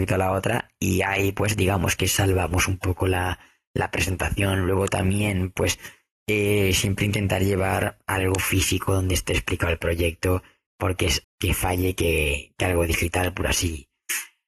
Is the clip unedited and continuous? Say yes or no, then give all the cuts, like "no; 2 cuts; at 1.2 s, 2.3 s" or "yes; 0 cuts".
no; 1 cut; at 11.2 s